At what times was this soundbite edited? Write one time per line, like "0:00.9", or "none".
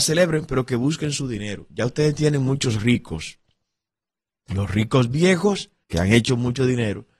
0:05.8